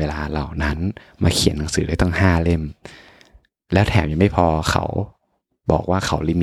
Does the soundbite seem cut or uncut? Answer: uncut